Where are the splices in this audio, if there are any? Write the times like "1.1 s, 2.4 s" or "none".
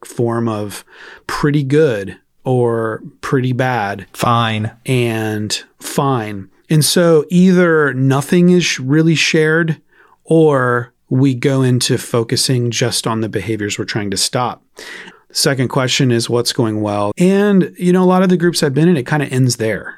11.0 s, 15.1 s, 17.1 s